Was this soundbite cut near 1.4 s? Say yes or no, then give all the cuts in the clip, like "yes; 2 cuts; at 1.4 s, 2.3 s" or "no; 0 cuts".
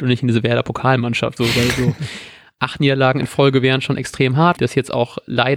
yes; 2 cuts; at 1.4 s, 4.6 s